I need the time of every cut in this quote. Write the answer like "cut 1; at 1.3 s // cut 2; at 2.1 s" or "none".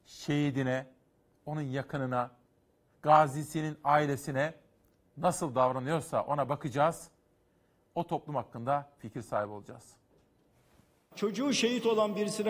cut 1; at 2.9 s